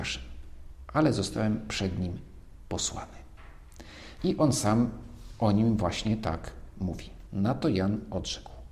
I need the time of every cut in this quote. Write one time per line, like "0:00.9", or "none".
0:04.2
0:07.3